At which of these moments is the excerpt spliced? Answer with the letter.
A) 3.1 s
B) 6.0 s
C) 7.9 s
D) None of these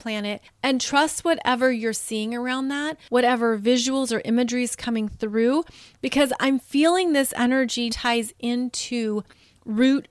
C